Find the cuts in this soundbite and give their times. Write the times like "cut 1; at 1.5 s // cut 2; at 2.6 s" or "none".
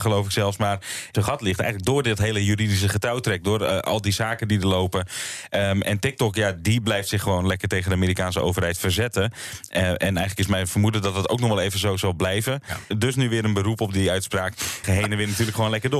cut 1; at 1.1 s // cut 2; at 12.9 s // cut 3; at 14.8 s